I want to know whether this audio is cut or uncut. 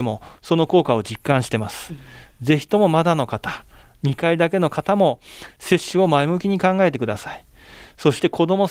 uncut